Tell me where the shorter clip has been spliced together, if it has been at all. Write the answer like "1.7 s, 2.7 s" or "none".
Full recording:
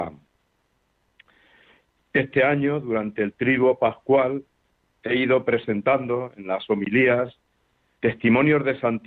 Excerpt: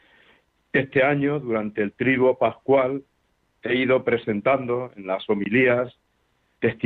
none